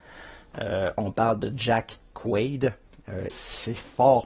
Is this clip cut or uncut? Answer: cut